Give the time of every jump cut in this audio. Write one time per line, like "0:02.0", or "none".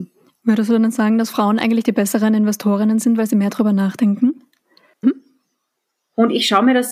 0:05.0